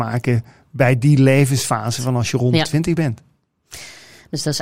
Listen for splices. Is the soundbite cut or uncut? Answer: uncut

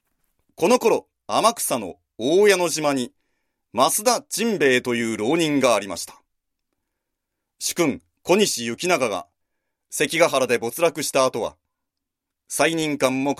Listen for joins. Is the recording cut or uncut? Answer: uncut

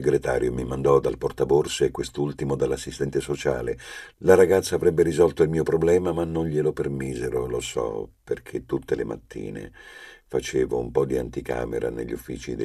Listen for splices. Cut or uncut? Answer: uncut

